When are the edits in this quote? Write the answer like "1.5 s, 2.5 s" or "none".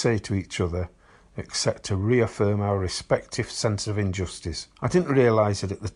4.7 s